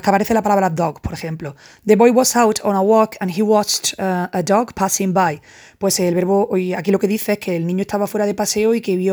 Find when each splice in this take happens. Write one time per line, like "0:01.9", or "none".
none